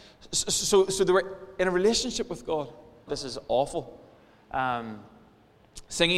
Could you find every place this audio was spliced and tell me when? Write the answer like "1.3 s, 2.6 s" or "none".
3.1 s